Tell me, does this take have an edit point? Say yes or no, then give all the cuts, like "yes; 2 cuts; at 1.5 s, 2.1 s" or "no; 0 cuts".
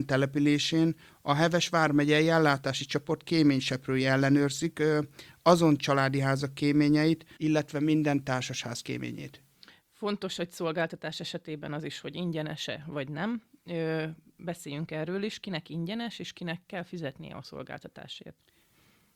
yes; 1 cut; at 7.4 s